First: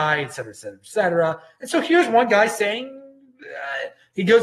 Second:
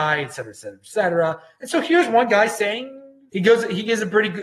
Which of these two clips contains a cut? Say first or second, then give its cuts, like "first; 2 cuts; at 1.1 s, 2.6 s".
second; 1 cut; at 3.3 s